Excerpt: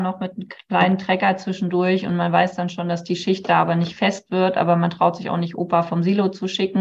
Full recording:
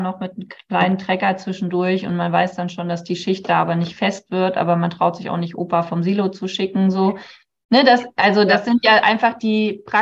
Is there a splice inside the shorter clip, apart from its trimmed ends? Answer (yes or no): no